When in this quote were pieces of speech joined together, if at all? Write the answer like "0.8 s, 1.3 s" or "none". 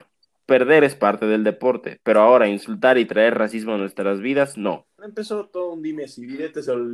5.0 s

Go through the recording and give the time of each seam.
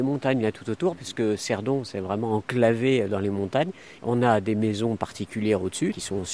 4.0 s

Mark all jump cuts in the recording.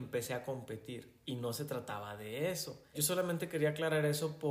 2.9 s

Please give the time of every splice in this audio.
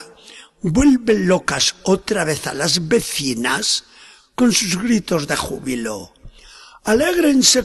none

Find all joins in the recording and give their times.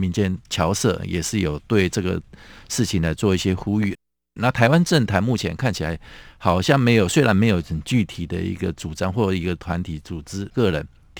none

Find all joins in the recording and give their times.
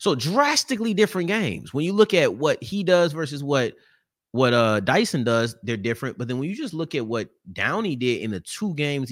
none

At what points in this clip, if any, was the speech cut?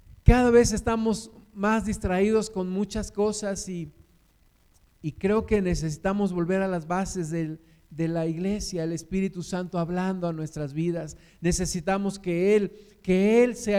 none

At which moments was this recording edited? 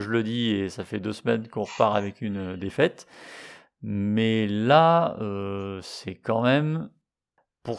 none

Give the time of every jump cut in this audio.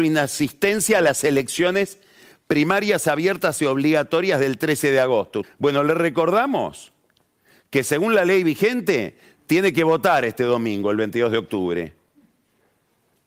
5.4 s

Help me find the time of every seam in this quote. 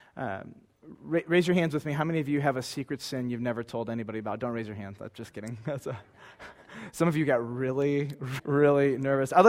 8.4 s

